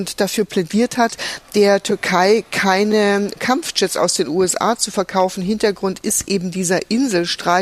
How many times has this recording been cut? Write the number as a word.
zero